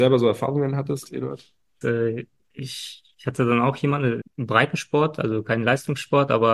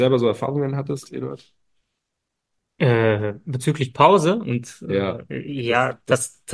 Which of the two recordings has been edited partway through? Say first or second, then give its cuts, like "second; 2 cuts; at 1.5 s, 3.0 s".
first; 2 cuts; at 1.8 s, 4.2 s